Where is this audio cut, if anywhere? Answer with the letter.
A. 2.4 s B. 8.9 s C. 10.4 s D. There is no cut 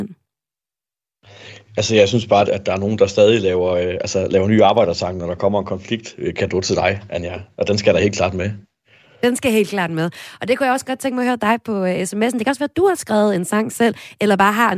A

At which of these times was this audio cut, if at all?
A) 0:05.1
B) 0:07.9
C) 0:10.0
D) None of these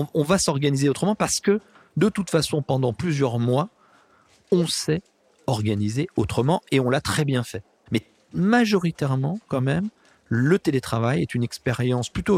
B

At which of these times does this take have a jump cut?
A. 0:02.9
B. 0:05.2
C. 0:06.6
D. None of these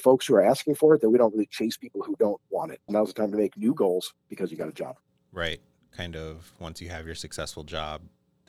A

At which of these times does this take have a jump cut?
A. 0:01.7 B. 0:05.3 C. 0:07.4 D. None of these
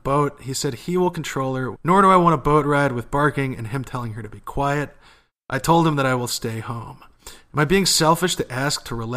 A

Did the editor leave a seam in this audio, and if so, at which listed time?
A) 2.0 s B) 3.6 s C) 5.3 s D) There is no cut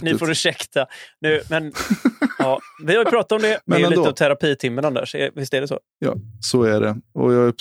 D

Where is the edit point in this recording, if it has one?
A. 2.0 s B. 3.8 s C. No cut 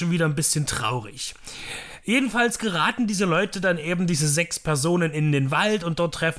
C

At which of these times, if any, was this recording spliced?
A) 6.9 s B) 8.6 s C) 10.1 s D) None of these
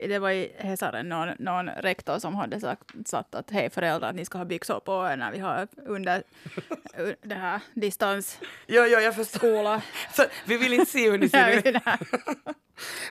B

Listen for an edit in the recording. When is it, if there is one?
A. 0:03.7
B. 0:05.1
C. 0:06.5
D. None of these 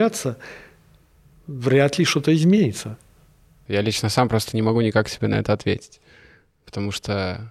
A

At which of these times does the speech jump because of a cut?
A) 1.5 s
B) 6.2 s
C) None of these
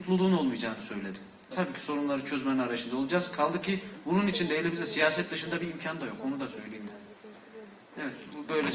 A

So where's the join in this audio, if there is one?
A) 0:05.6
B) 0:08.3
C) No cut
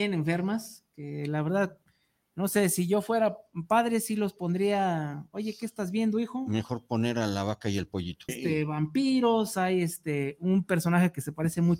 B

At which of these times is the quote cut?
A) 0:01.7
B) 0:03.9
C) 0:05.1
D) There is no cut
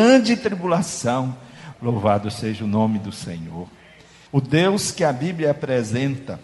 A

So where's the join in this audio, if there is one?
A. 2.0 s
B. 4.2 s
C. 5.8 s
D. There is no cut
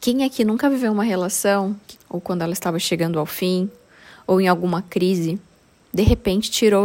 A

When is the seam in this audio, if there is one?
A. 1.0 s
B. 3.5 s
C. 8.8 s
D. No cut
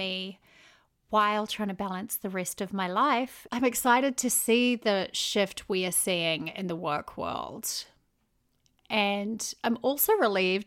B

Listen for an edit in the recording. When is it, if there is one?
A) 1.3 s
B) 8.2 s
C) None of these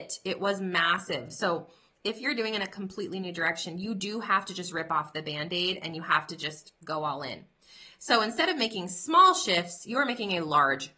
C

